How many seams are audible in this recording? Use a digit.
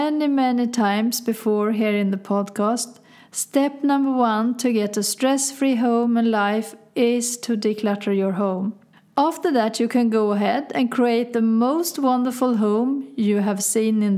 0